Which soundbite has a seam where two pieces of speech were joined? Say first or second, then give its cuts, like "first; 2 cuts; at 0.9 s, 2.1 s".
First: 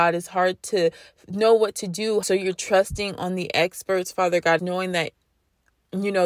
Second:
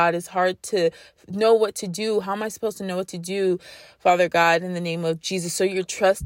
first; 2 cuts; at 2.2 s, 4.6 s